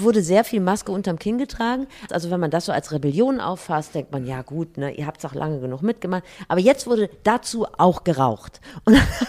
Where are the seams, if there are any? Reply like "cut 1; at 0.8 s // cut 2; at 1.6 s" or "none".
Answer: cut 1; at 2.1 s